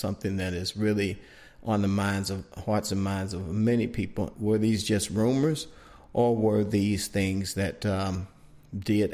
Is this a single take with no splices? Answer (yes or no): no